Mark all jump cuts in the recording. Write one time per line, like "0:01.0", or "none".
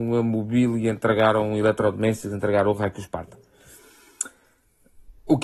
none